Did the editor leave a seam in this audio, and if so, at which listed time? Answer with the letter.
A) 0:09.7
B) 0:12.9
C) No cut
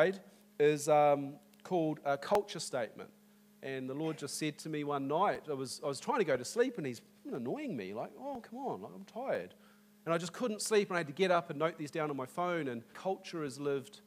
B